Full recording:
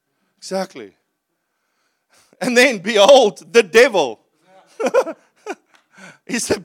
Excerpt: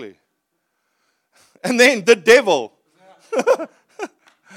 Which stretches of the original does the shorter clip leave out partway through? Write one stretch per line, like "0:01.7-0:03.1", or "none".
0:02.8-0:03.5